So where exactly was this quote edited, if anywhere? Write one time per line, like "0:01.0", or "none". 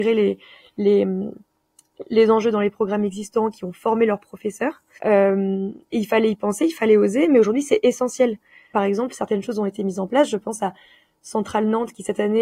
0:05.0
0:08.7